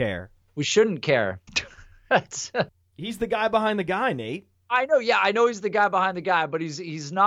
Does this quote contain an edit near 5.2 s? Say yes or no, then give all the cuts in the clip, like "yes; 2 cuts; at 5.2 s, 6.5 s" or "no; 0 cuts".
no; 1 cut; at 1.5 s